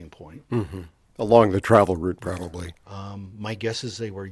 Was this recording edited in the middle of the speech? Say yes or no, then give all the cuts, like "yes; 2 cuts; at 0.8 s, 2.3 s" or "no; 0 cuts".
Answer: yes; 1 cut; at 2.7 s